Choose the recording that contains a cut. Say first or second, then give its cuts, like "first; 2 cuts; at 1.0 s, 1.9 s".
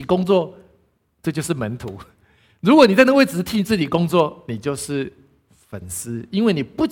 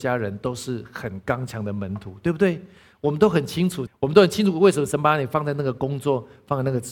second; 1 cut; at 3.9 s